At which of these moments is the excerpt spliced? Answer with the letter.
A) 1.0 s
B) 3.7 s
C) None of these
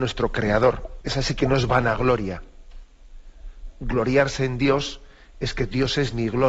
A